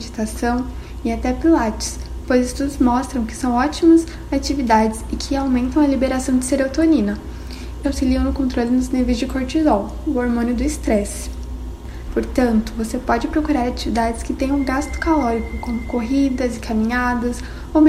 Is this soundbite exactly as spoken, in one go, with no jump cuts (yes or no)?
no